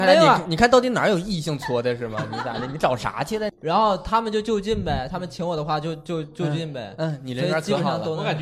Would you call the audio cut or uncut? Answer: cut